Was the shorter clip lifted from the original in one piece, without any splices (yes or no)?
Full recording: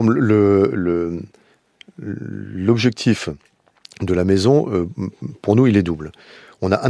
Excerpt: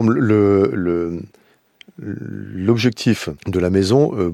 no